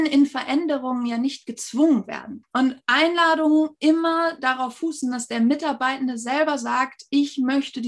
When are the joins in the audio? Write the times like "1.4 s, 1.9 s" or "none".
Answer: 2.4 s

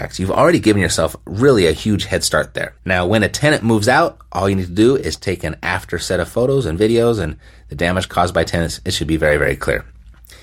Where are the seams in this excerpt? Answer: 2.8 s

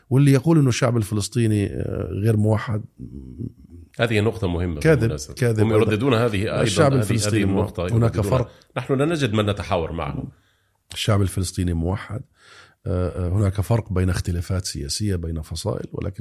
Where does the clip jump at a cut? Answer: none

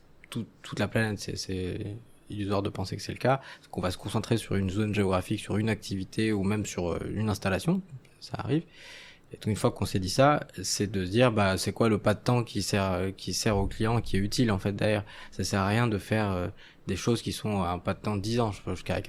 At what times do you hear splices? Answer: none

